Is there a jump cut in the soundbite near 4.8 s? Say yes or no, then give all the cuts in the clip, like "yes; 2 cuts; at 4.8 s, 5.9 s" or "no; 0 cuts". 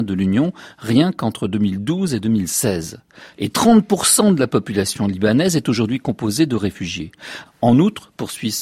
no; 2 cuts; at 3.3 s, 7.4 s